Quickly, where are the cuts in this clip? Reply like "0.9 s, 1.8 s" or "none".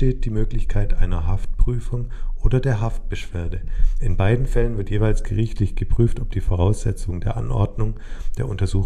none